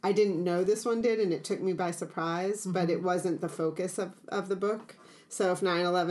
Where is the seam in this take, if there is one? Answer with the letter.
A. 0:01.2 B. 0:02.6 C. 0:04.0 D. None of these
D